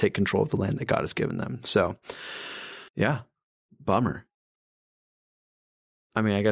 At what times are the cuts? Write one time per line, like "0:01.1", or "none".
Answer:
0:02.9

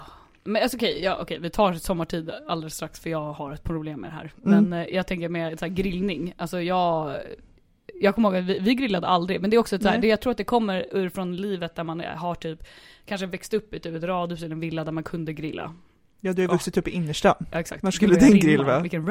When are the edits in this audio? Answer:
none

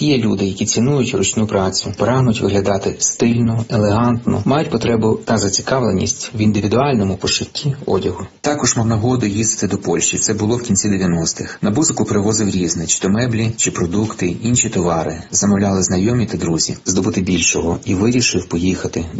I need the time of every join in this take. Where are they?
0:16.9

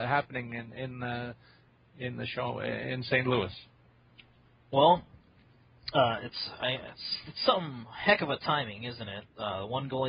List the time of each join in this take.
none

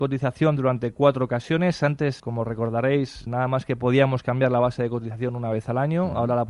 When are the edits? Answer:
0:02.2
0:03.3

